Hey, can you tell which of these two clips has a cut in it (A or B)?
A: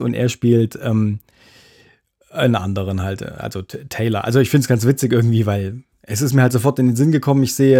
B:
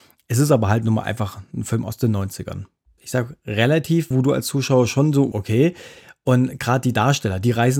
B